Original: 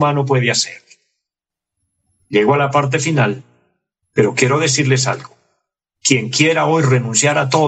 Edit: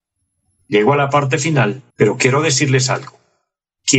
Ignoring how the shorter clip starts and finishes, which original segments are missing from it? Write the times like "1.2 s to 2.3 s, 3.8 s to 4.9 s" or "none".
3.5 s to 4.1 s